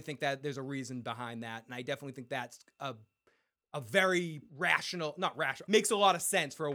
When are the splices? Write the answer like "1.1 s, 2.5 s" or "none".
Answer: 4.5 s, 5.7 s

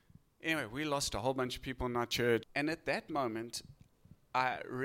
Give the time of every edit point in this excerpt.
2.4 s

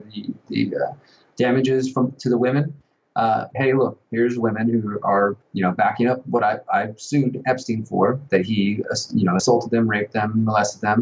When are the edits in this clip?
3.5 s

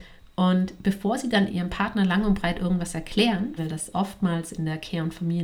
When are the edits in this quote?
1.5 s, 3.6 s

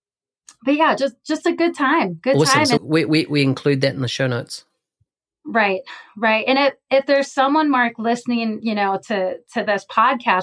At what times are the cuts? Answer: 2.8 s

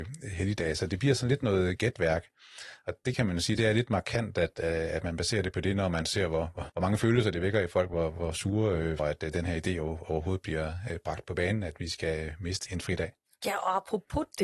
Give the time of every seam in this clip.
6.7 s, 9.0 s, 12.7 s

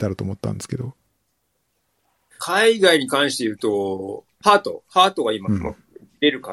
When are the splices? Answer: 2.4 s, 4.4 s, 5.4 s

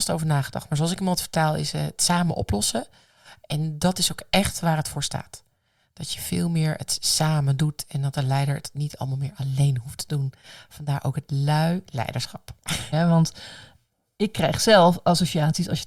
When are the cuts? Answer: 12.9 s

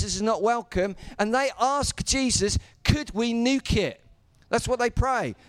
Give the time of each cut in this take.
none

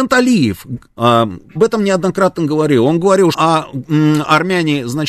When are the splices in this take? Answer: 1.6 s, 3.3 s

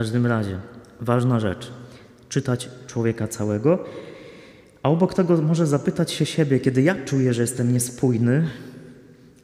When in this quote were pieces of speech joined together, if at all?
none

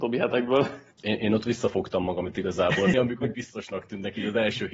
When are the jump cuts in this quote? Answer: 0.9 s, 2.9 s

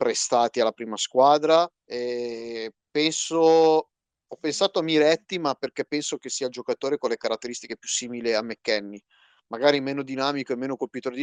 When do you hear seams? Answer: 1.8 s

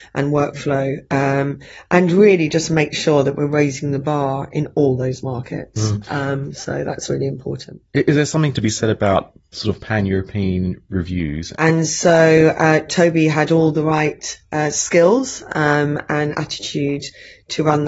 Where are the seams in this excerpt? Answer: 11.6 s

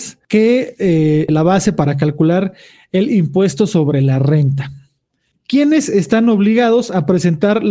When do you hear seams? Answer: 1.3 s, 5.3 s

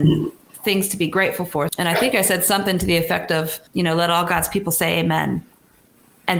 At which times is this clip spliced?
1.7 s, 3.7 s

